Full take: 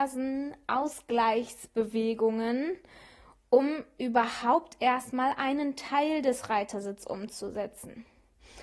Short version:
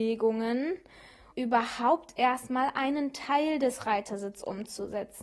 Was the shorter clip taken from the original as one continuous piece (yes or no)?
no